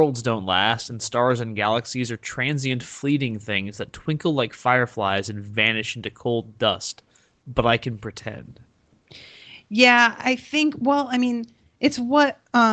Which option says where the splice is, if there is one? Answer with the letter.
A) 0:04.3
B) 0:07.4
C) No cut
C